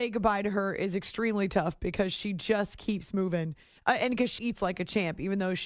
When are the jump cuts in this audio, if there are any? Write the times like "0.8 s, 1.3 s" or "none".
4.4 s